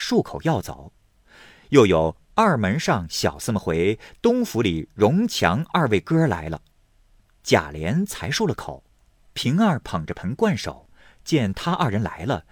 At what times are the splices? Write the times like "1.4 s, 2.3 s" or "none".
none